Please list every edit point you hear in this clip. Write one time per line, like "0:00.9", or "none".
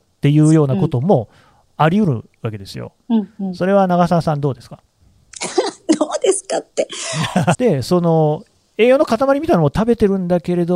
0:07.5